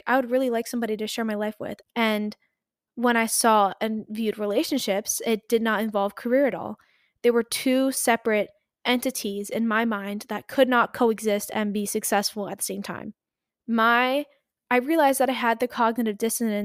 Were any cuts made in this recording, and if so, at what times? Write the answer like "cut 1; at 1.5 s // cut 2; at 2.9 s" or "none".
cut 1; at 1.8 s // cut 2; at 13.5 s

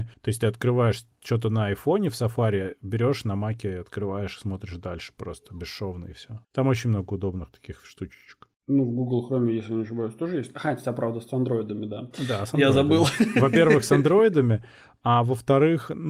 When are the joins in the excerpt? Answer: none

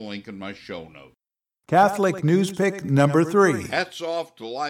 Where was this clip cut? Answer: none

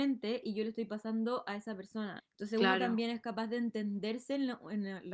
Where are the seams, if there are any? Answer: cut 1; at 2.2 s

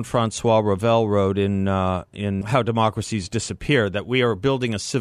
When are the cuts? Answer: cut 1; at 2.4 s

